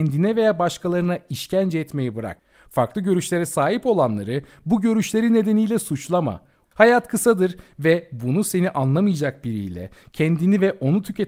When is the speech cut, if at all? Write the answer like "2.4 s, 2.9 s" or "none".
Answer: 6.6 s